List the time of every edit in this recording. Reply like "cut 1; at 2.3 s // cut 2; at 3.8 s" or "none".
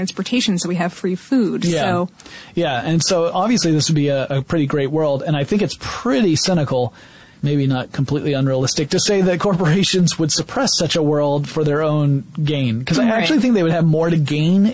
none